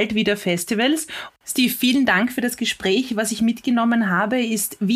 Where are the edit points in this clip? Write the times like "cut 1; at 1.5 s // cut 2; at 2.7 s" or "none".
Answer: cut 1; at 1.3 s